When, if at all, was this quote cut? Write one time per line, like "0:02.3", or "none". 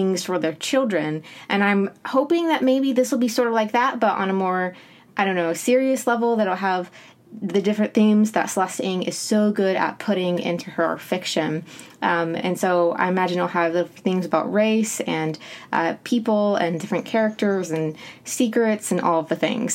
none